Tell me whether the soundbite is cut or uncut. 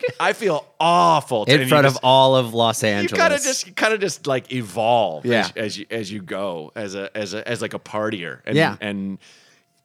uncut